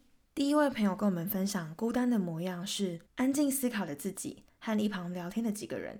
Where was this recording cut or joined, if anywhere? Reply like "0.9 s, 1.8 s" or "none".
3.1 s